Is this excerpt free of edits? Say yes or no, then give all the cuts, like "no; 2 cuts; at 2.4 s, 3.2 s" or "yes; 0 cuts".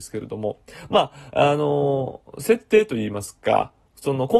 yes; 0 cuts